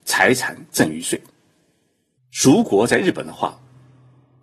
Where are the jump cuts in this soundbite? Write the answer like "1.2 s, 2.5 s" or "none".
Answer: 2.2 s